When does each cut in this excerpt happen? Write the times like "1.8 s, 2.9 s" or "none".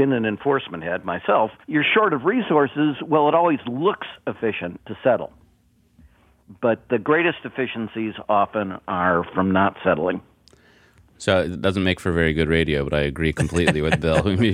1.6 s